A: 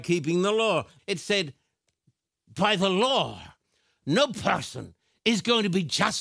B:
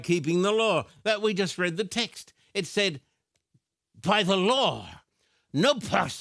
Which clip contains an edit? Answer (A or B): A